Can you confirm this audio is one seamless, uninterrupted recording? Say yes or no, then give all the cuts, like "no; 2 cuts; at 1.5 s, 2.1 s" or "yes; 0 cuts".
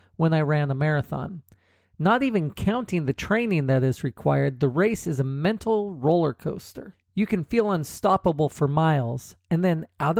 no; 1 cut; at 6.9 s